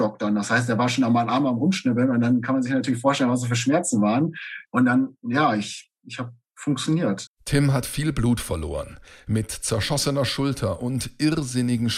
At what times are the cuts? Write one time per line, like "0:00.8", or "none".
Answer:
0:04.7
0:07.3